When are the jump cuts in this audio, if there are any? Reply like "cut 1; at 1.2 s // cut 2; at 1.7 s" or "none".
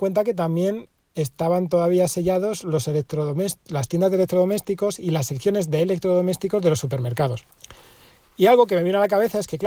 none